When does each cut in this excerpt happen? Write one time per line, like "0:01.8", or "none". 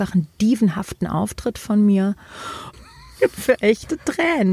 0:02.7